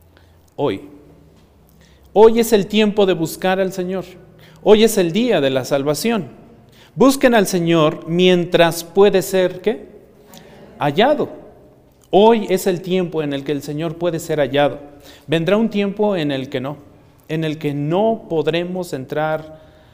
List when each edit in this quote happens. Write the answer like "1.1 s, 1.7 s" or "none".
none